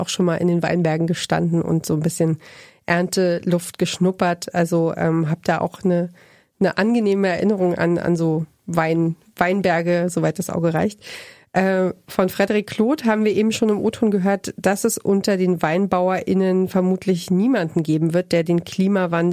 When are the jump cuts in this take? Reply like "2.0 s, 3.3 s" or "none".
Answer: none

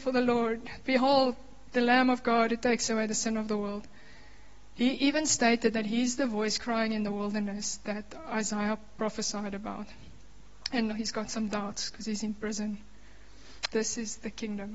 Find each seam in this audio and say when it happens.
10.9 s, 13.7 s

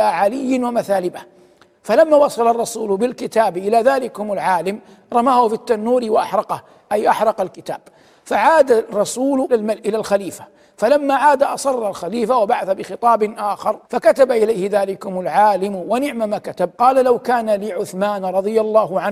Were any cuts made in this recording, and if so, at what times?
9.5 s, 13.8 s, 16.7 s

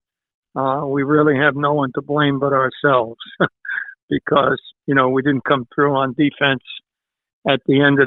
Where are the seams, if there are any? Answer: 4.7 s

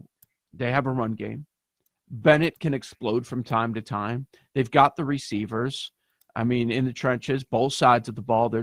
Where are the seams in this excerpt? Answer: none

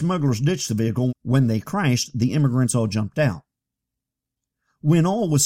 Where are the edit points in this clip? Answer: 1.1 s

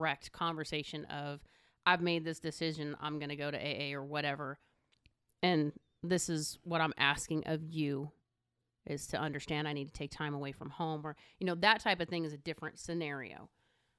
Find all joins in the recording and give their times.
none

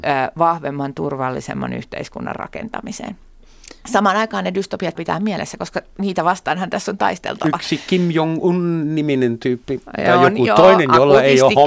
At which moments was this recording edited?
5.0 s

